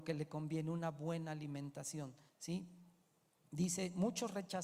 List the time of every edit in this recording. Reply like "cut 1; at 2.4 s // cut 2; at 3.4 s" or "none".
cut 1; at 2.3 s

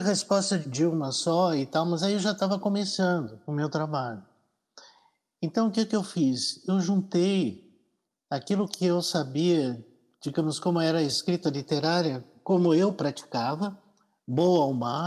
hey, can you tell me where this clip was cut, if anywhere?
none

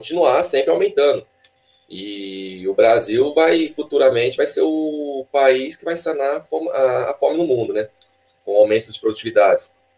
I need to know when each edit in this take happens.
none

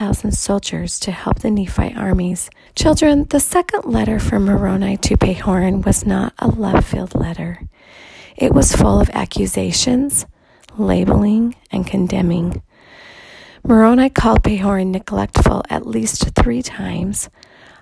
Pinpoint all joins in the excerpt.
cut 1; at 2.7 s

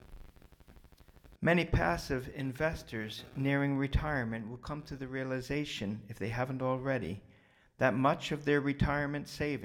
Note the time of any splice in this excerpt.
cut 1; at 1.3 s

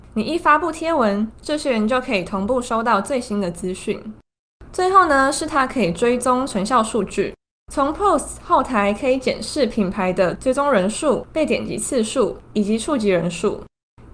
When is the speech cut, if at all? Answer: cut 1; at 11.2 s

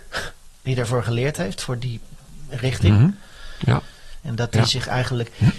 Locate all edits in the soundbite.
cut 1; at 4.2 s

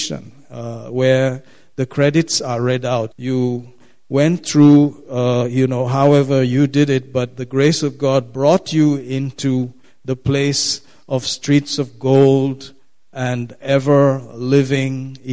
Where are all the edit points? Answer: cut 1; at 3.1 s

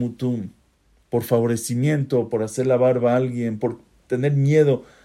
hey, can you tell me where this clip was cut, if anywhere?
cut 1; at 1.0 s // cut 2; at 3.6 s

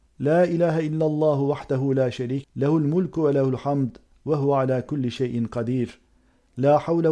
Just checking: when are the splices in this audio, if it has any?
cut 1; at 2.4 s

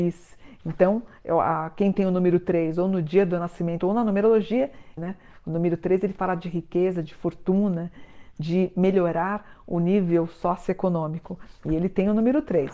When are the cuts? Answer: cut 1; at 3.8 s // cut 2; at 5.0 s

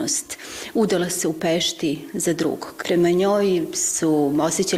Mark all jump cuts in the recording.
cut 1; at 2.8 s

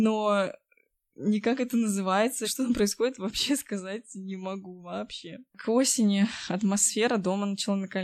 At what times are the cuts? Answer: cut 1; at 2.4 s // cut 2; at 5.5 s

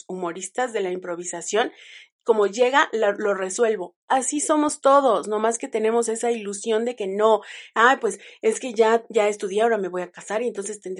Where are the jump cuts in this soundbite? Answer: none

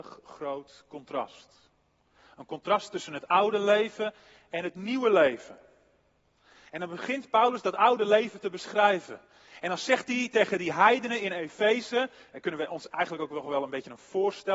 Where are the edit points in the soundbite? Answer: none

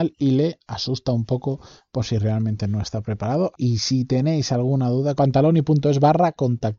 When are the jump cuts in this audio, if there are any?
cut 1; at 3.5 s // cut 2; at 5.2 s

